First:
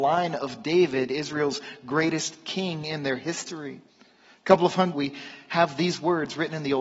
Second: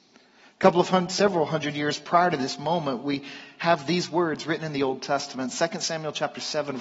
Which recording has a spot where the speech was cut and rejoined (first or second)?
first